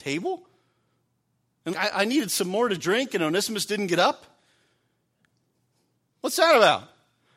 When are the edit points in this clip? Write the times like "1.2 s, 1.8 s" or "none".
1.7 s